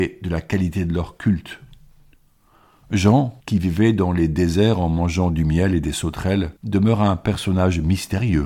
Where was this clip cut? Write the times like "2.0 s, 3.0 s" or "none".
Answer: 3.4 s, 6.6 s